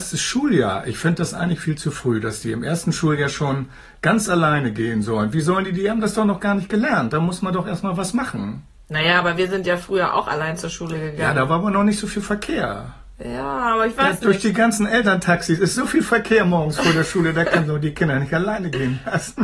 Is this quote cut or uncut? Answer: uncut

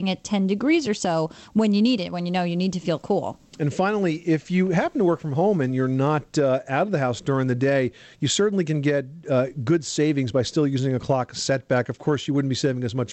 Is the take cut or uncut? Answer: uncut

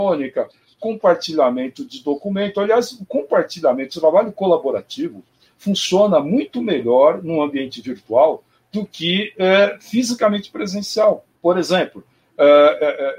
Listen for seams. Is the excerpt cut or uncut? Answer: cut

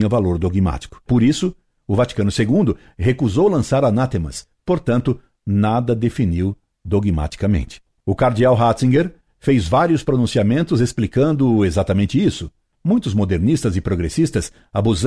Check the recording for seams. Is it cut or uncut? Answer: cut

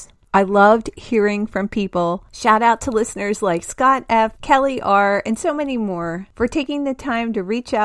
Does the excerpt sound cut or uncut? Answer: uncut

